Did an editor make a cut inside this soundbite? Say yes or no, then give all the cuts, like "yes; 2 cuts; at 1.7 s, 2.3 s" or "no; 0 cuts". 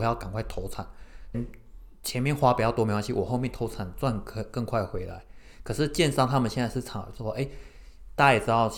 yes; 1 cut; at 1.3 s